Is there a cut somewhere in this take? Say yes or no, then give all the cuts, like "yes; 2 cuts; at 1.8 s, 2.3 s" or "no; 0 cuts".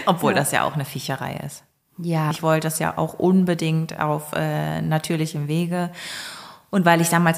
yes; 1 cut; at 2.3 s